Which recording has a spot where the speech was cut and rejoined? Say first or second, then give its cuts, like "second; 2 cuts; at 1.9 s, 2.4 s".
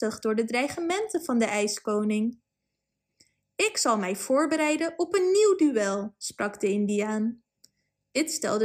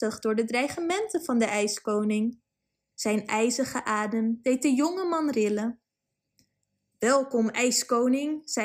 second; 1 cut; at 2.9 s